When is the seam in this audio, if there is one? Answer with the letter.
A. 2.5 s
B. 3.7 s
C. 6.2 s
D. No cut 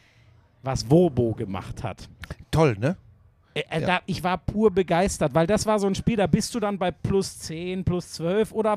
B